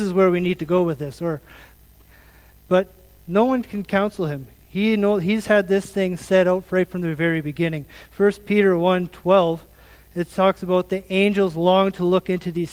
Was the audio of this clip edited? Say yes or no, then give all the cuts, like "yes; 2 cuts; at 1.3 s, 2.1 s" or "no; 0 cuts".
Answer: no; 0 cuts